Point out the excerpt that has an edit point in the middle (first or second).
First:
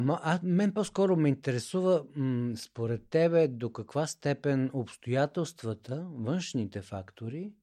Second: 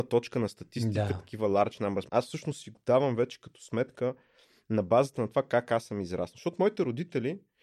second